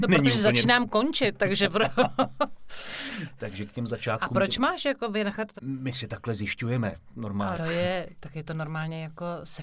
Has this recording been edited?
yes; 2 cuts; at 5.6 s, 7.5 s

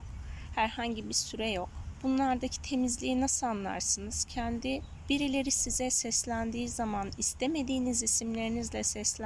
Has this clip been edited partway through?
no; 0 cuts

